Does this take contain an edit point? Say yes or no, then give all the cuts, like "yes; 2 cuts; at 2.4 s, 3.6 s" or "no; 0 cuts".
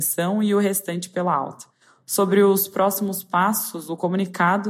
no; 0 cuts